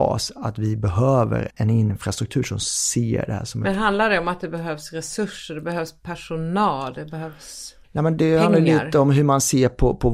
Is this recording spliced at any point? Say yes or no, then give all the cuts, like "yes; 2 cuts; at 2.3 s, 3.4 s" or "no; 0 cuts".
yes; 2 cuts; at 1.5 s, 7.8 s